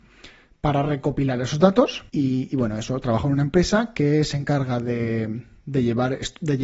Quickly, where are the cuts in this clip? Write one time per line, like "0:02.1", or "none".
0:02.1